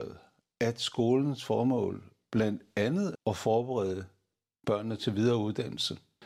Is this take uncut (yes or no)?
no